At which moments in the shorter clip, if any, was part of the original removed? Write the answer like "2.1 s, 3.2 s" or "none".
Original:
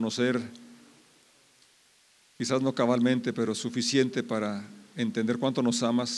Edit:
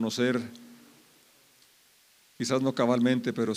none